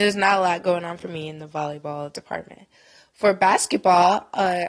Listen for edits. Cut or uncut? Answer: uncut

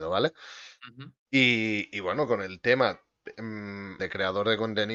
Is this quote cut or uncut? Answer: cut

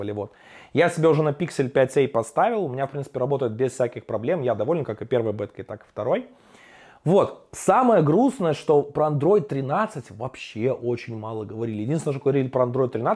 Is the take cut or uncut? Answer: uncut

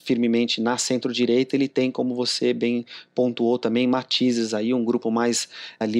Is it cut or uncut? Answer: uncut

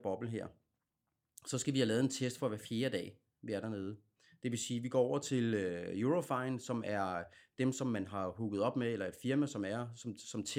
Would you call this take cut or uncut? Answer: uncut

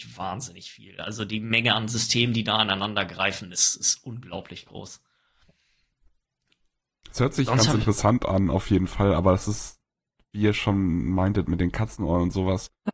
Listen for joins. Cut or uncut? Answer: uncut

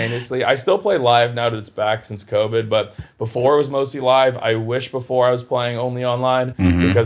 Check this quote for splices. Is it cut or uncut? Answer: uncut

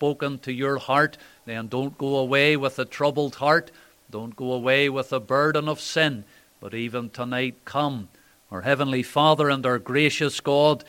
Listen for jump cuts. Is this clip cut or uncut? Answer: cut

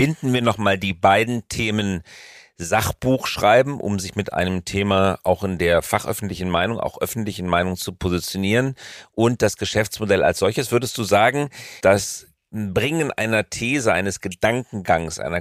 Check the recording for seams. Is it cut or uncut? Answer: cut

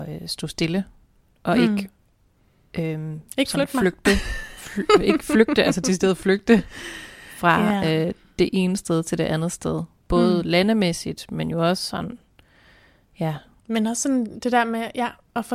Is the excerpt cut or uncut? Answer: uncut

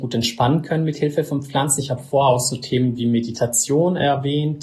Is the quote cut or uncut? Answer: uncut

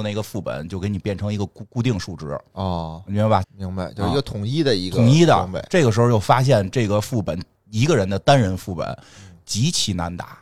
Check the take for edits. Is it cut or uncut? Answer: cut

